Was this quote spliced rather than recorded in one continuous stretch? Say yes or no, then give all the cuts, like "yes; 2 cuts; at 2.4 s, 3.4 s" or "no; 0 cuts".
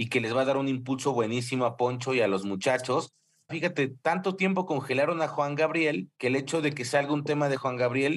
yes; 2 cuts; at 3.5 s, 6.1 s